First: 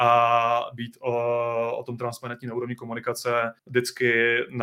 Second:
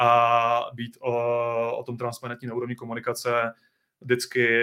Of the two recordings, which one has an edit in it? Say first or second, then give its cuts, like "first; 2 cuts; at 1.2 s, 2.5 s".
first; 1 cut; at 3.6 s